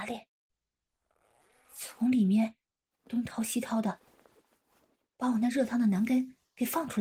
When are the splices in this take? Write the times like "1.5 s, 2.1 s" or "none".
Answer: none